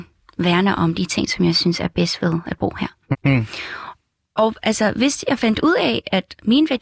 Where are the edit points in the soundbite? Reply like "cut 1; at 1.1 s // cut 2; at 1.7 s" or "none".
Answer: cut 1; at 3.1 s